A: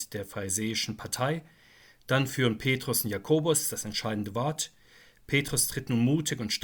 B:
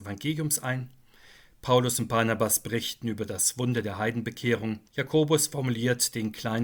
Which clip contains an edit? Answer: B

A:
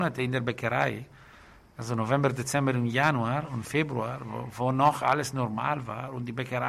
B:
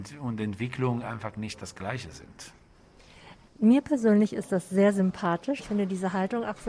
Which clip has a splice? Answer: B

